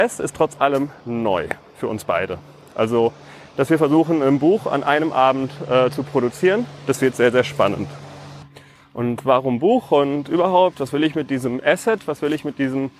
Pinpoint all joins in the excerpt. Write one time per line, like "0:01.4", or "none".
none